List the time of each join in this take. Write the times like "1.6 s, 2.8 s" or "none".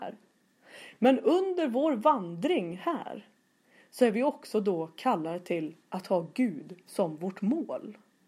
none